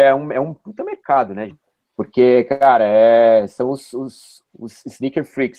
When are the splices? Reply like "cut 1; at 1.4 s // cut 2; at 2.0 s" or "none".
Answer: cut 1; at 1.5 s